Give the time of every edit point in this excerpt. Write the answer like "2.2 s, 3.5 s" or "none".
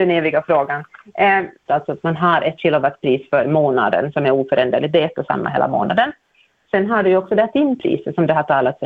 1.7 s